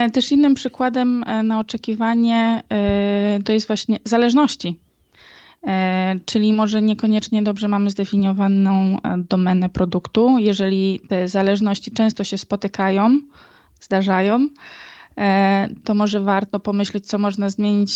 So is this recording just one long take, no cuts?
yes; 0 cuts

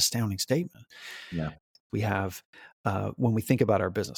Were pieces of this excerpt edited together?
yes; 1 cut; at 1.9 s

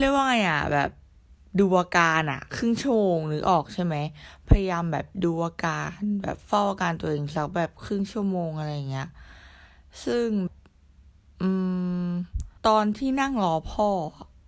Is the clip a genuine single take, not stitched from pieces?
no; 2 cuts; at 10.5 s, 12.6 s

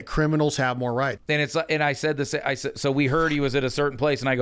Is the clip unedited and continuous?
no; 1 cut; at 1.2 s

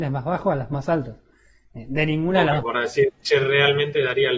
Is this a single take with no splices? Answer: no; 1 cut; at 2.6 s

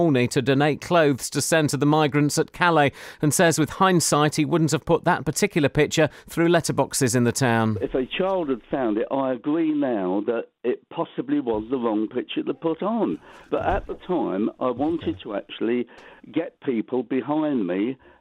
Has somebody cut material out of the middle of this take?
no; 0 cuts

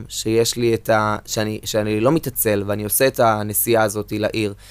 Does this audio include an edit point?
no; 0 cuts

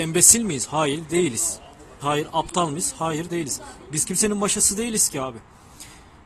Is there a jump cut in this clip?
yes; 1 cut; at 2.0 s

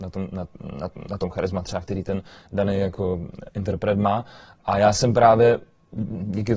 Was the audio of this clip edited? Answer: no; 0 cuts

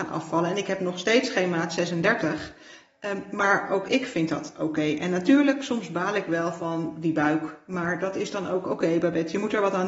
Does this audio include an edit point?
no; 0 cuts

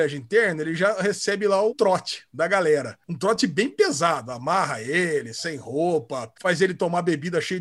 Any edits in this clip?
yes; 2 cuts; at 1.7 s, 6.4 s

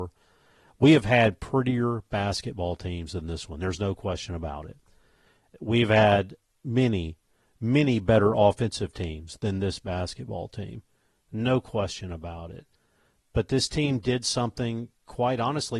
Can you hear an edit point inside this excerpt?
no; 0 cuts

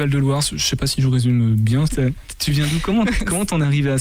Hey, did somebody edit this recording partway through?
yes; 1 cut; at 1.9 s

